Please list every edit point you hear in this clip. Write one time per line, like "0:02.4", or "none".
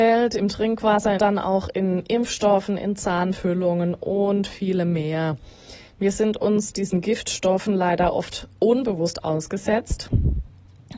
0:01.2